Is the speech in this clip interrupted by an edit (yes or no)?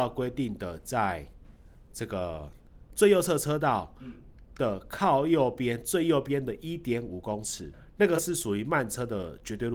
no